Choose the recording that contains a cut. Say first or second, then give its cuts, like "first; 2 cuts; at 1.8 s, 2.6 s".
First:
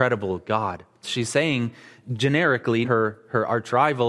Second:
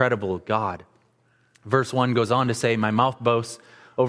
first; 2 cuts; at 1.0 s, 2.8 s